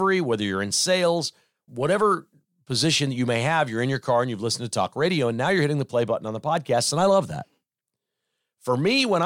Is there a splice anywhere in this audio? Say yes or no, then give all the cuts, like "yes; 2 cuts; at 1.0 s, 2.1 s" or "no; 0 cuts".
yes; 1 cut; at 1.7 s